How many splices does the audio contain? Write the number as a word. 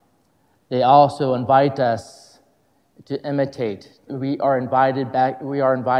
one